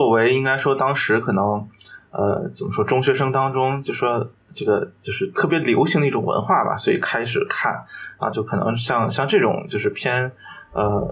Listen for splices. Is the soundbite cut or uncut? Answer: cut